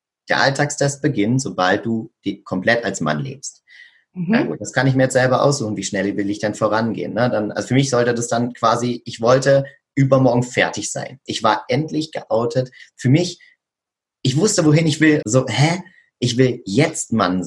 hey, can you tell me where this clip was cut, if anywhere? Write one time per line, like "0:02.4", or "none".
0:11.3
0:15.2

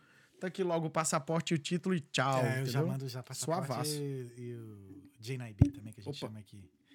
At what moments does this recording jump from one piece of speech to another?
none

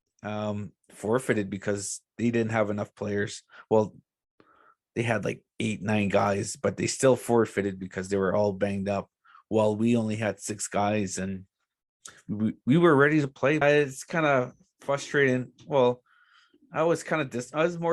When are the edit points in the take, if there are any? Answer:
0:13.6

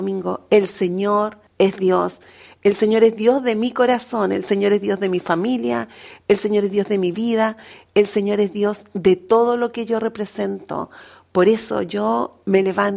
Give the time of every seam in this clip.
0:01.5

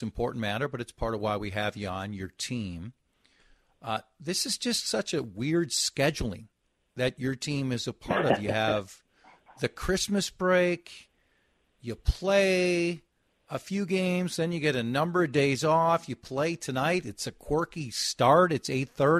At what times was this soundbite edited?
none

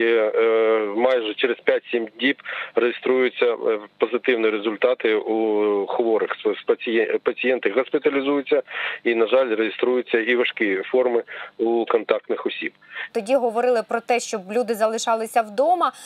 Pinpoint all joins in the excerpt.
0:13.1

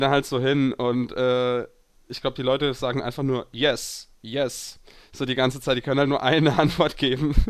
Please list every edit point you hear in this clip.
0:04.1

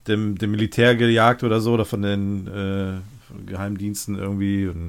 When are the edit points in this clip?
none

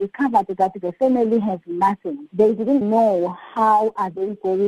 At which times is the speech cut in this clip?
0:02.8

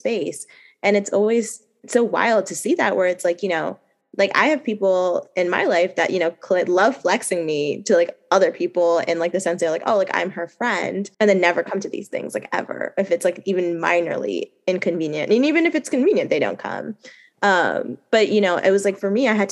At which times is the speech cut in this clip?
0:11.1

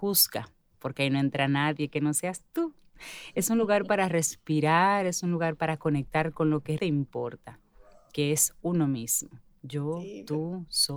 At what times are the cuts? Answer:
0:06.8

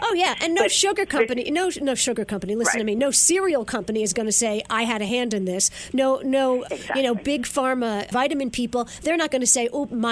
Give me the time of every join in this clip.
0:06.6
0:08.1

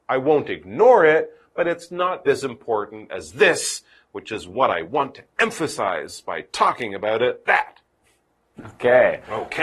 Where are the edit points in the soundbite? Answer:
0:02.3
0:07.4

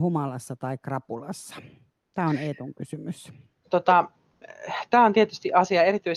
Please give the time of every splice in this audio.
0:03.6

